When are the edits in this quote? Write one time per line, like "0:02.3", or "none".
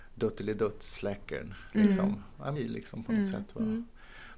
0:02.6